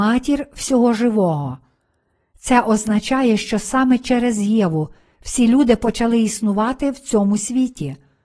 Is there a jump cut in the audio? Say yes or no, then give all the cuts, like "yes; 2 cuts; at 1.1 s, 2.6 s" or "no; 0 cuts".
no; 0 cuts